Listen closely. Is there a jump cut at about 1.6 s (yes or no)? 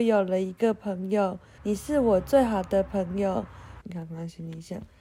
yes